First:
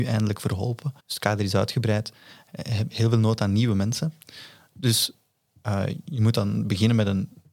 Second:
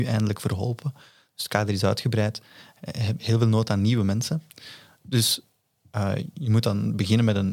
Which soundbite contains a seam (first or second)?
first